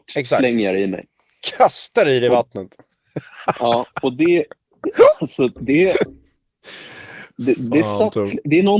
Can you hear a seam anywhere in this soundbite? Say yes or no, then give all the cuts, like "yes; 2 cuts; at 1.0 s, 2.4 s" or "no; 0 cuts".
no; 0 cuts